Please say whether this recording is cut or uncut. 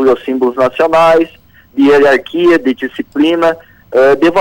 uncut